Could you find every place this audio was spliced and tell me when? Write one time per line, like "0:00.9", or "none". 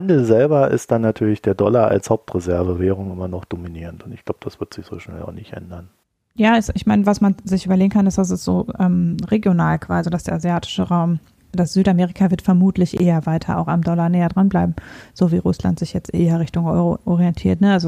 0:10.0